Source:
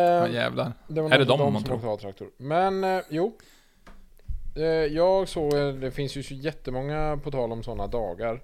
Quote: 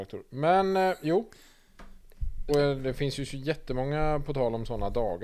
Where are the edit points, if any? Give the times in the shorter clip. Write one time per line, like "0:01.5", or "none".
0:02.5